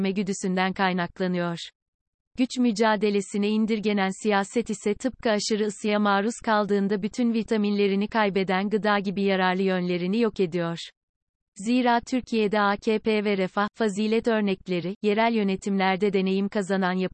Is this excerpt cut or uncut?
uncut